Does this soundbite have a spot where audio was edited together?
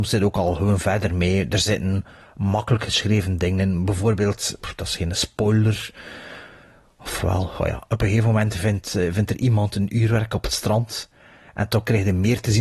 no; 0 cuts

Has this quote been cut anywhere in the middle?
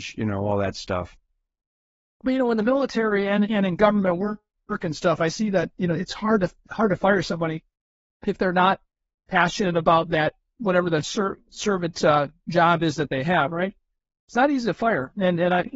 no; 0 cuts

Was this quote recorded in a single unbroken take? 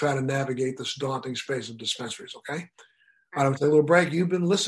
yes; 0 cuts

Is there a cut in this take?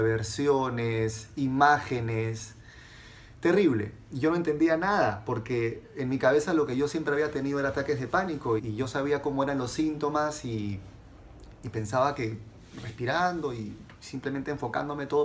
yes; 1 cut; at 8.6 s

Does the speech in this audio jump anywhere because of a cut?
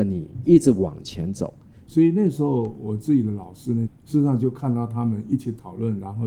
yes; 2 cuts; at 1.8 s, 3.9 s

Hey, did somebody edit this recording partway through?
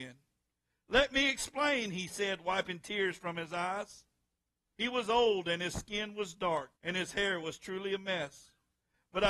yes; 2 cuts; at 4.7 s, 6.7 s

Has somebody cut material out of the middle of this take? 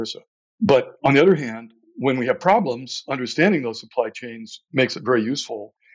no; 0 cuts

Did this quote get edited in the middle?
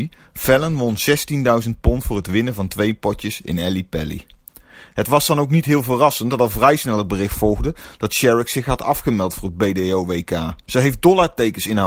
yes; 1 cut; at 10.6 s

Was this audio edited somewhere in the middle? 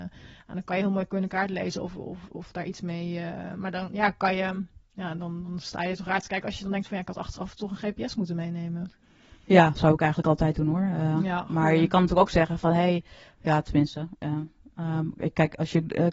no; 0 cuts

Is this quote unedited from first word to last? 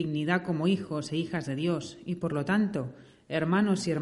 yes; 0 cuts

